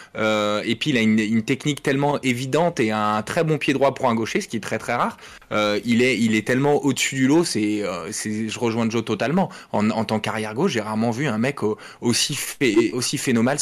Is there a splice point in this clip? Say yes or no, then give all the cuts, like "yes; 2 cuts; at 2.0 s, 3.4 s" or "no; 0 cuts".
no; 0 cuts